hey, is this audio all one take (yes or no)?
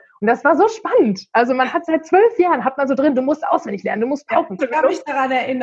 no